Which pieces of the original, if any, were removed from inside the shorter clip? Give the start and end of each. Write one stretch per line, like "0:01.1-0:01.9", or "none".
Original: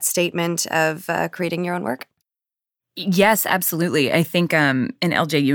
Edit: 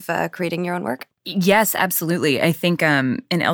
0:02.2-0:02.9